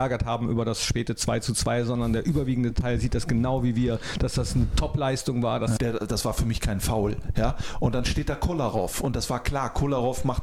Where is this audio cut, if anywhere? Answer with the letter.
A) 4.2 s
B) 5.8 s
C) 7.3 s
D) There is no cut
B